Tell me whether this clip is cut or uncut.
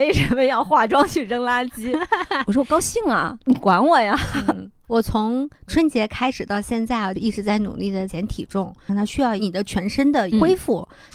cut